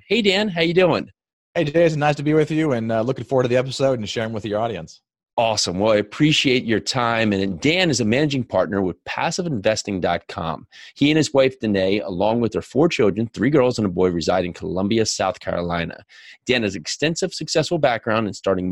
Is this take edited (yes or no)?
no